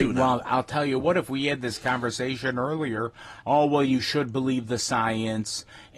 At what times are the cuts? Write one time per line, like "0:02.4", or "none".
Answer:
0:03.4